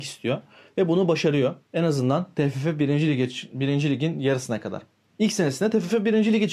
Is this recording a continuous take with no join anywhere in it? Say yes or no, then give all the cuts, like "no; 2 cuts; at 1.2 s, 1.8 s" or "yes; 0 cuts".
no; 1 cut; at 1.6 s